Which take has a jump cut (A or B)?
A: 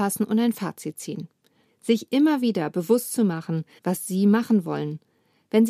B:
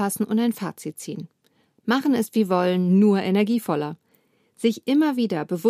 A